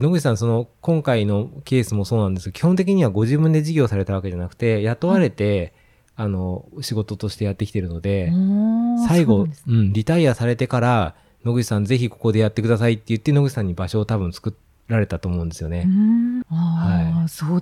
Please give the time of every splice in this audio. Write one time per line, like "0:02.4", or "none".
0:16.4